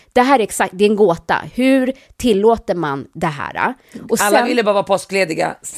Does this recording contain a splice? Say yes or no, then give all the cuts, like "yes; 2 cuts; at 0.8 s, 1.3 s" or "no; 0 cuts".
no; 0 cuts